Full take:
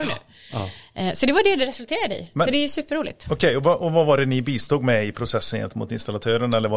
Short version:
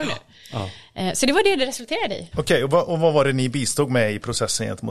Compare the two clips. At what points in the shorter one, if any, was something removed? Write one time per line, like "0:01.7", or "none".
0:02.3

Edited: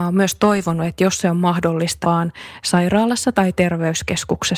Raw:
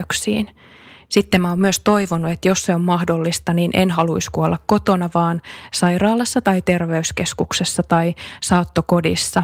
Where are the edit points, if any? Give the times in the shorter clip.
0:02.0

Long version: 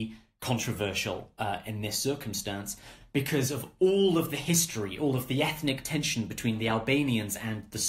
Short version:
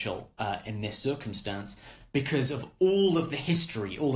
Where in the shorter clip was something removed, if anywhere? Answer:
none

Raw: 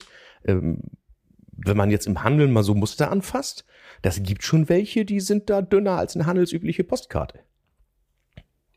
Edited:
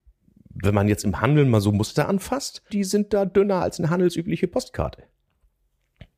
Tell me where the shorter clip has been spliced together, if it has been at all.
0:02.7

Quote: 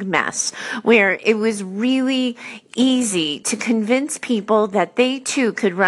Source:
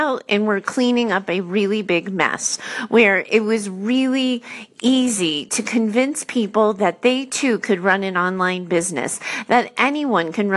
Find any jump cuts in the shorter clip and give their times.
none

